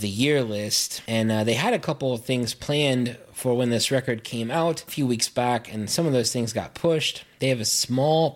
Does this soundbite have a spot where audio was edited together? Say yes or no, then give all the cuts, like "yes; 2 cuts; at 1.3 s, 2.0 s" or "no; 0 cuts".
no; 0 cuts